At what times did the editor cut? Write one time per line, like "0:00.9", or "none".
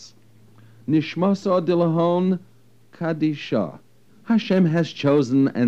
0:04.1